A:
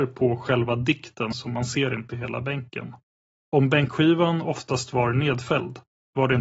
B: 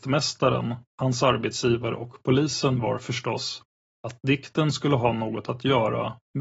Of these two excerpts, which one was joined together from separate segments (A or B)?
A